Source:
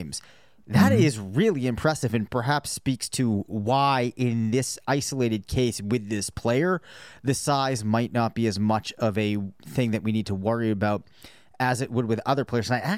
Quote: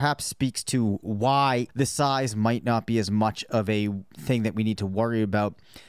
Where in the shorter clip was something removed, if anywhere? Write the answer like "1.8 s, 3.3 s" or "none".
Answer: 1.7 s